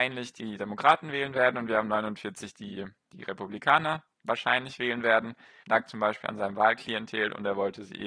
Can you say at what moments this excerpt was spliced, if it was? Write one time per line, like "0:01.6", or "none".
0:05.6